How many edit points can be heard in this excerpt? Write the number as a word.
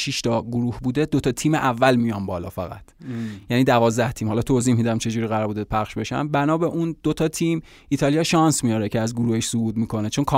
zero